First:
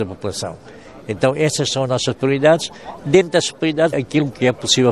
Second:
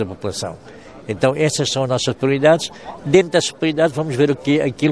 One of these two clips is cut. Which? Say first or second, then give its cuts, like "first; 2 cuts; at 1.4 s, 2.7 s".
first; 1 cut; at 3.9 s